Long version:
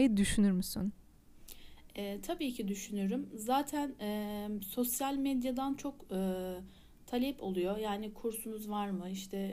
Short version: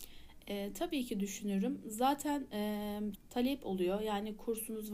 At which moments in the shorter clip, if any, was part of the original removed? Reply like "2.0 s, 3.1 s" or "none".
3.1 s